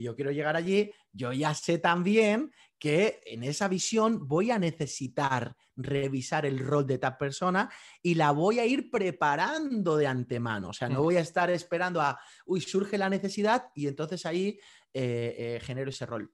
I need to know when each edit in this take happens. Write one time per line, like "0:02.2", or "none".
none